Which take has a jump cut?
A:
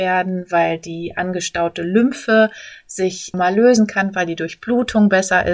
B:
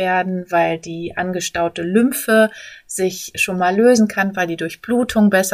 A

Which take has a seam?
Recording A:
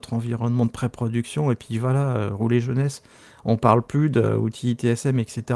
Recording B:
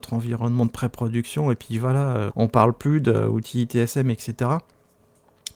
B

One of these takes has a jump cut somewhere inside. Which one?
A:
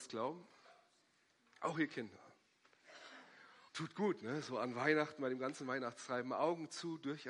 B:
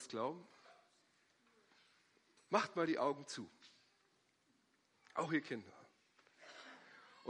A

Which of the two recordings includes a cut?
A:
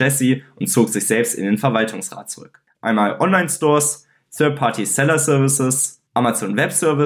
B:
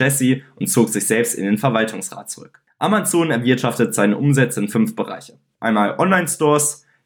A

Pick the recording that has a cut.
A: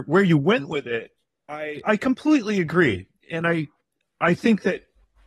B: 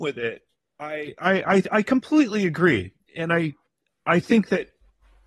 A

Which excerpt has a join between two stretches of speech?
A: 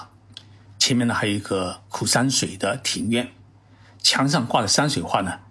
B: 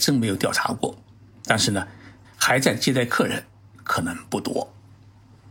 B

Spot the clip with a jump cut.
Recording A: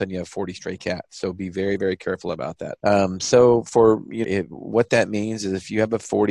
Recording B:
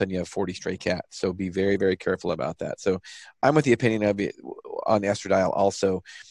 A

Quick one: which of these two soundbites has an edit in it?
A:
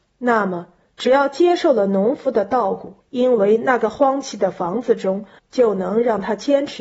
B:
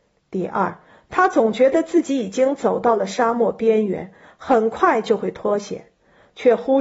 A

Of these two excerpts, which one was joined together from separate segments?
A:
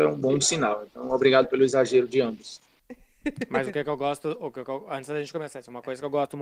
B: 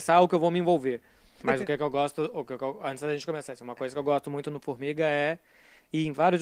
B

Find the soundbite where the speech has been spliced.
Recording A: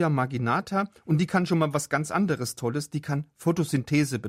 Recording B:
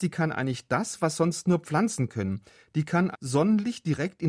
B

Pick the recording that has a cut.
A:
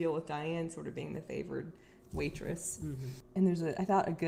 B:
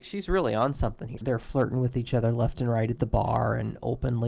B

